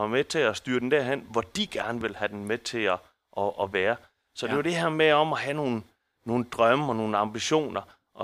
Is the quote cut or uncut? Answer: uncut